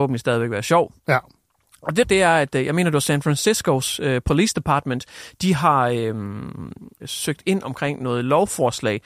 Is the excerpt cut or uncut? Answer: cut